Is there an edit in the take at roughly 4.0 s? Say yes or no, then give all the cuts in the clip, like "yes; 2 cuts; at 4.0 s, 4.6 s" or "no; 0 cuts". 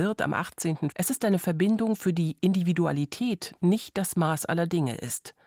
no; 1 cut; at 0.9 s